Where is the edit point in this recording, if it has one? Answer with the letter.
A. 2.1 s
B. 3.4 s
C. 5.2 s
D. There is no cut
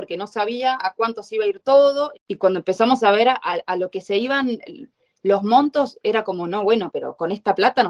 A